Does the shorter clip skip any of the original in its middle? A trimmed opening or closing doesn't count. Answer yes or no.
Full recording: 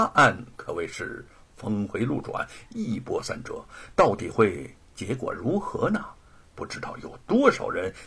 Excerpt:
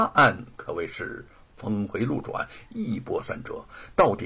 no